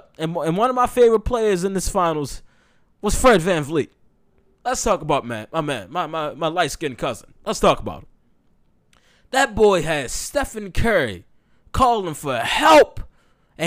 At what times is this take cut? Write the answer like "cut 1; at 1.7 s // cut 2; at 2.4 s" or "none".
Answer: none